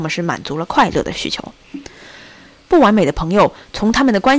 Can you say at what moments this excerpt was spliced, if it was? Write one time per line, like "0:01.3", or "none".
none

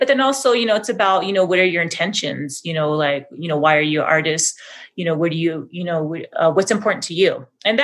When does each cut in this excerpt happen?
none

